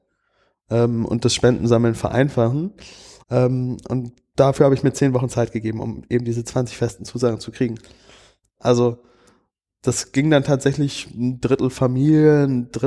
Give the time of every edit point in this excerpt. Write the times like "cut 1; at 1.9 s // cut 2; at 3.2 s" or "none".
cut 1; at 3.2 s // cut 2; at 8.6 s